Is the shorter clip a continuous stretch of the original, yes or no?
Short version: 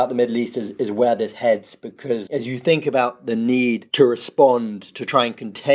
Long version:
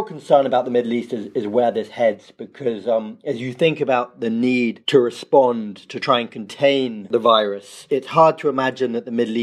no